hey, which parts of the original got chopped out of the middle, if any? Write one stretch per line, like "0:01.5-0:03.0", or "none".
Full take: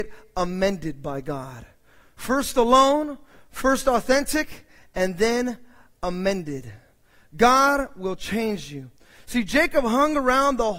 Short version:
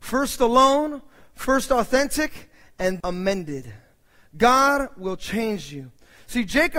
0:05.2-0:06.0